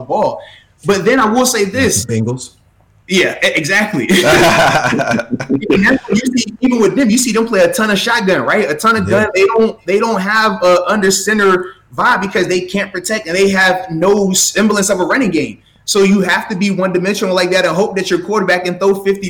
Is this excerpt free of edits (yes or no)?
yes